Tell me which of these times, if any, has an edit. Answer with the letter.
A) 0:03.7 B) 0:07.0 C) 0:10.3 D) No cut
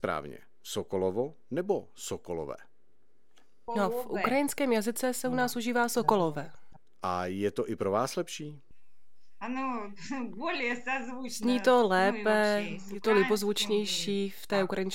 A